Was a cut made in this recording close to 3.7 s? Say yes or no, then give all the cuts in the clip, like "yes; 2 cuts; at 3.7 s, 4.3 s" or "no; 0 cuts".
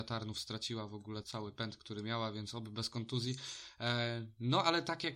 no; 1 cut; at 1.2 s